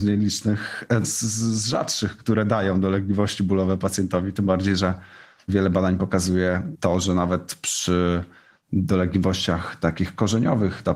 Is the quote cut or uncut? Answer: cut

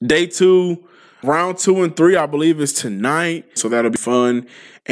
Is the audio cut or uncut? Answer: cut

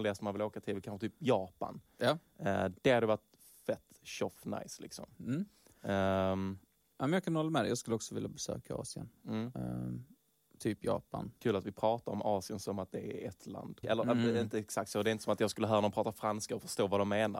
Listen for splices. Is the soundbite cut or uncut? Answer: cut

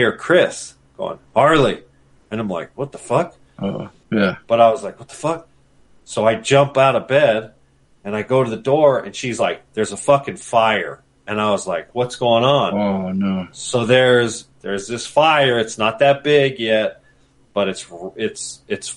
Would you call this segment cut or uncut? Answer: cut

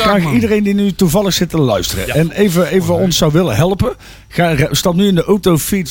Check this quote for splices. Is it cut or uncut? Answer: cut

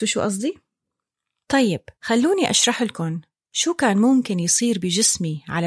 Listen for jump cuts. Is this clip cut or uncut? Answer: cut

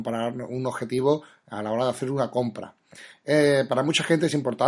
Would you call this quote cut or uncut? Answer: uncut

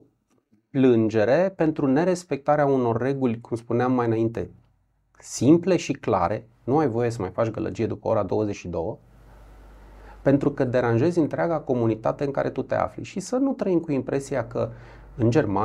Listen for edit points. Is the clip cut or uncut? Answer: uncut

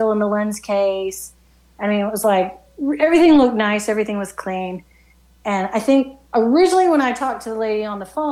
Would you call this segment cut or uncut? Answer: uncut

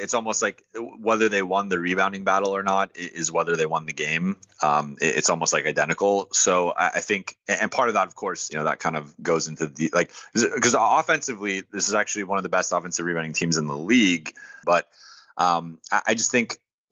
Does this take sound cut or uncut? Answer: cut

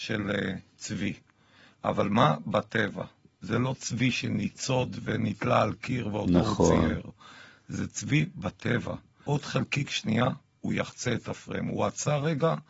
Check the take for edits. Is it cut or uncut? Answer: cut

